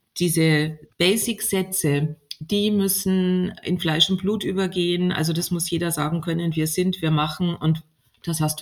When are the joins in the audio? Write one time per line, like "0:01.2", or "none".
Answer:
0:00.9